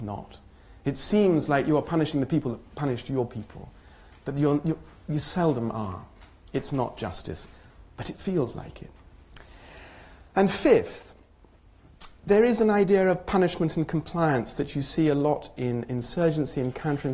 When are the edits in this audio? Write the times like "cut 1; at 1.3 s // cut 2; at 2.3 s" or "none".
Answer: cut 1; at 12.2 s